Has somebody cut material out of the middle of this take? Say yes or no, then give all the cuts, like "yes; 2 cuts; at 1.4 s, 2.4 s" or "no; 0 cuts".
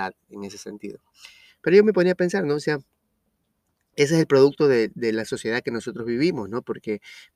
no; 0 cuts